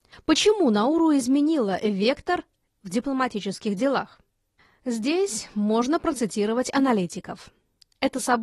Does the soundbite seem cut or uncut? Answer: uncut